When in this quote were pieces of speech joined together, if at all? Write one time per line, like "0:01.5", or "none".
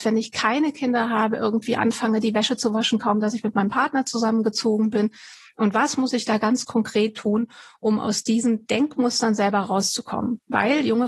none